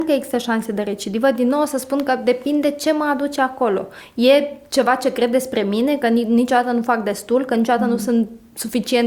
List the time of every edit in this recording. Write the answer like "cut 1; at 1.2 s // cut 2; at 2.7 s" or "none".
none